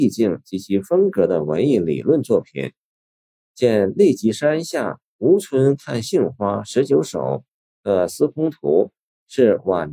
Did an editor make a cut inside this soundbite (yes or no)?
yes